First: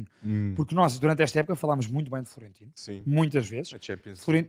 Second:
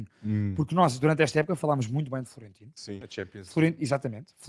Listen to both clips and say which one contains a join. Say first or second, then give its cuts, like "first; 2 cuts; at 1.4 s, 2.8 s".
second; 1 cut; at 3.0 s